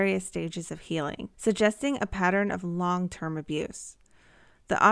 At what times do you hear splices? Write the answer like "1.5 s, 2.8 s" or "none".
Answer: 1.3 s